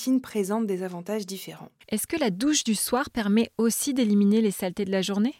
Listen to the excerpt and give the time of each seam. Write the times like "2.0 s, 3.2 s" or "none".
1.8 s